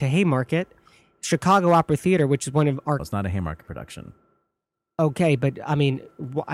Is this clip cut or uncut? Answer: cut